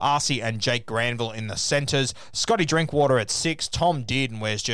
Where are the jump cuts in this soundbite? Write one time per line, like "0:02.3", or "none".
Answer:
none